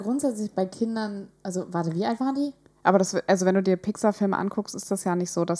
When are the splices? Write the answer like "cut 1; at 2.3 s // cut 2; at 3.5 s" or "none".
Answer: cut 1; at 2.8 s